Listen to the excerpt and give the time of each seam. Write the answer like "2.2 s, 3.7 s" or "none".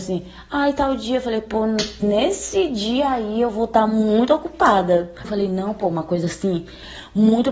5.2 s